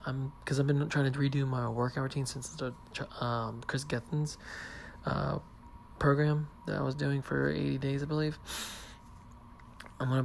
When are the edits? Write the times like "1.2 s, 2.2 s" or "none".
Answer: none